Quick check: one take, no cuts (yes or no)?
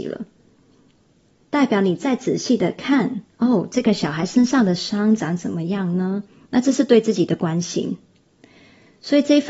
no